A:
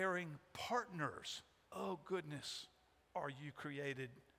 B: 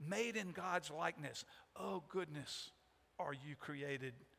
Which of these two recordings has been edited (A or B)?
A